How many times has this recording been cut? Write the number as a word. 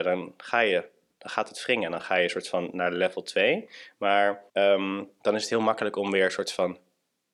one